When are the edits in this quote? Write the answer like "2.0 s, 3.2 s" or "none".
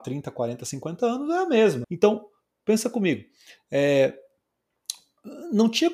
1.8 s